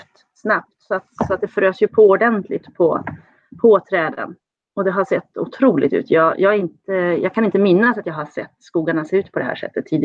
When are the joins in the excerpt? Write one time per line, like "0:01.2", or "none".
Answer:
none